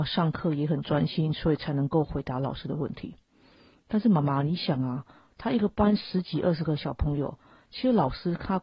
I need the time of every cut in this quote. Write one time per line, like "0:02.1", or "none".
0:05.3